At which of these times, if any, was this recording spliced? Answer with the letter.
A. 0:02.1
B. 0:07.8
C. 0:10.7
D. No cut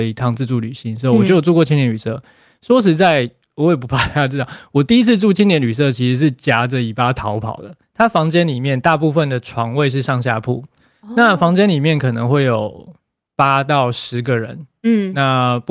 B